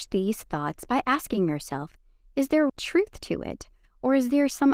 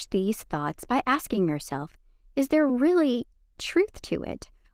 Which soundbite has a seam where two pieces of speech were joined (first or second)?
first